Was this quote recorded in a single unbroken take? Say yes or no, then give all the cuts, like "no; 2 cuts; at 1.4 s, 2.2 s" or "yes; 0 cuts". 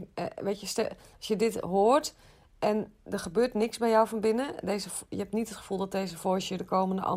yes; 0 cuts